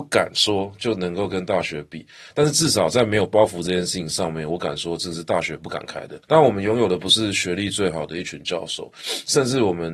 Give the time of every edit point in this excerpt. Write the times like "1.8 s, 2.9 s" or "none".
6.2 s

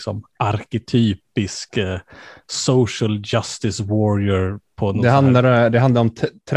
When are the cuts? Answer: none

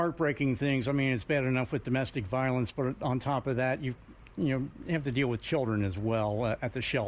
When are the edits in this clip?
none

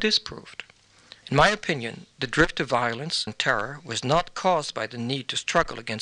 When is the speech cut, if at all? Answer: 1.2 s, 3.3 s

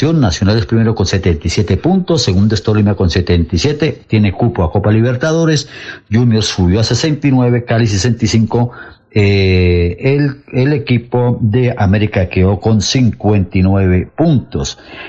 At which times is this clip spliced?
none

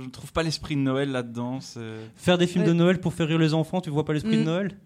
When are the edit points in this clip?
none

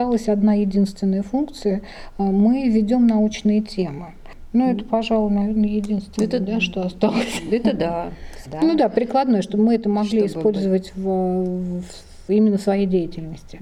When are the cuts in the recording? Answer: 8.5 s

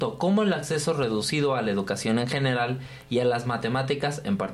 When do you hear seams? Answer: none

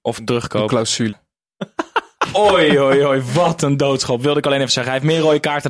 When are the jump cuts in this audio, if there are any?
1.1 s

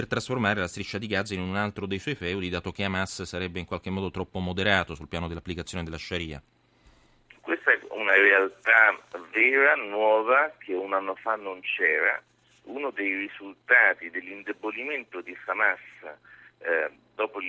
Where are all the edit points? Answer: none

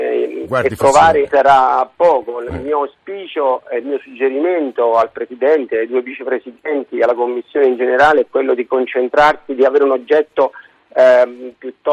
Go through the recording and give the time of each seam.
1.2 s

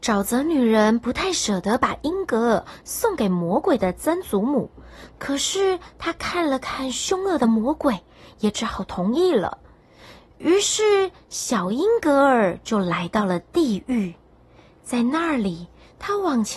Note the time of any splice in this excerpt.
none

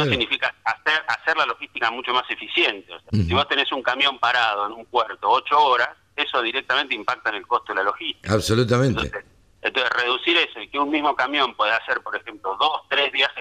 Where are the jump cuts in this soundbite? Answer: 3.1 s

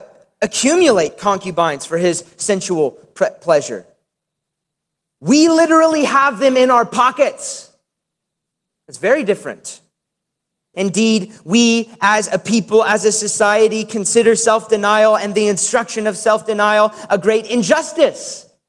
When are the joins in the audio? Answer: 10.7 s

